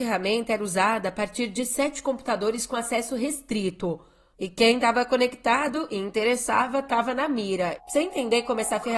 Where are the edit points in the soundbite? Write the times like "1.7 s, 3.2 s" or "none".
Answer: 4.3 s, 7.8 s